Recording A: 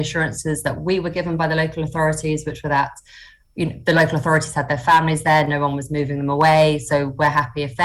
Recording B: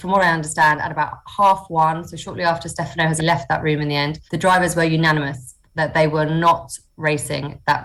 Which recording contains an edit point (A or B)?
B